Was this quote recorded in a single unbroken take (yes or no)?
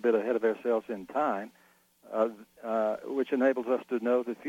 yes